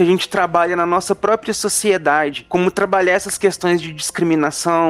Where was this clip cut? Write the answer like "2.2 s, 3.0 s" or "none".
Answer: none

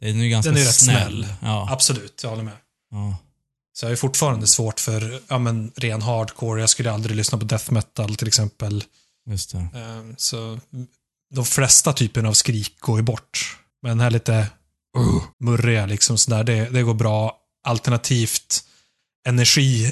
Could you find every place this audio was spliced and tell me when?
13.7 s, 15.3 s

